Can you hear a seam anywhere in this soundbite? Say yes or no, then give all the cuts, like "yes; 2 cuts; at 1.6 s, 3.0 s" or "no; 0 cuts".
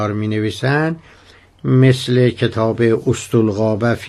no; 0 cuts